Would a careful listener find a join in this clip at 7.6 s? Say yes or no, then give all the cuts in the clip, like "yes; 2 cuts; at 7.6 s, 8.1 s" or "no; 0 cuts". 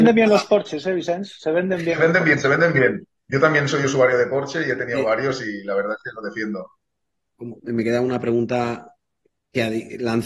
yes; 1 cut; at 7.6 s